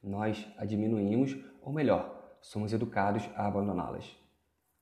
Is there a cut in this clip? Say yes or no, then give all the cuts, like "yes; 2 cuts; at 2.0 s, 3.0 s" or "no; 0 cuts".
no; 0 cuts